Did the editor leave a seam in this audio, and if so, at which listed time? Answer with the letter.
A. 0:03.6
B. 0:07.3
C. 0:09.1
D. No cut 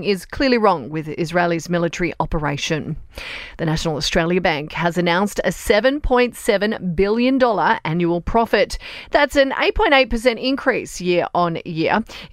D